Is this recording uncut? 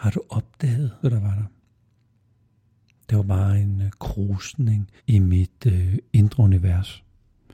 no; 2 cuts; at 1.0 s, 5.0 s

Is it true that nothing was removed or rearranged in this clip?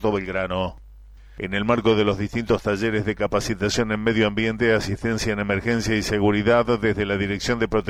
yes; 0 cuts

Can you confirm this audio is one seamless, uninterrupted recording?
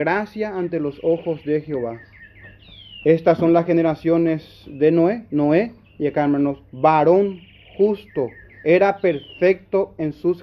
yes; 0 cuts

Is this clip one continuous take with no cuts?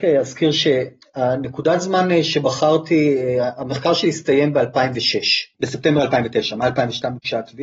no; 1 cut; at 5.5 s

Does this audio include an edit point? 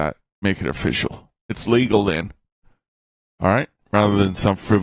no; 0 cuts

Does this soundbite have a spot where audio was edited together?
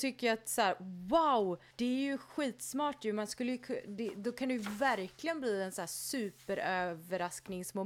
no; 0 cuts

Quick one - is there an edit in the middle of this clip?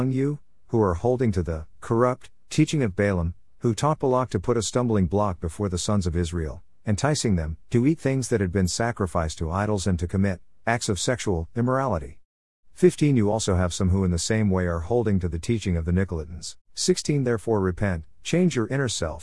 no; 0 cuts

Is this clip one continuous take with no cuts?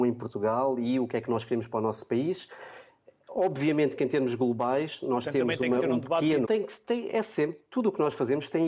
no; 1 cut; at 6.4 s

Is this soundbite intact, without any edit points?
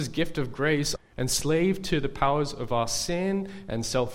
no; 1 cut; at 1.0 s

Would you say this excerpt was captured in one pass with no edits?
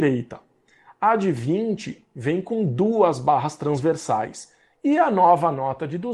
yes; 0 cuts

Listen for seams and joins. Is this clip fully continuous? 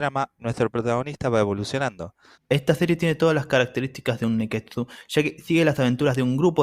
no; 1 cut; at 2.3 s

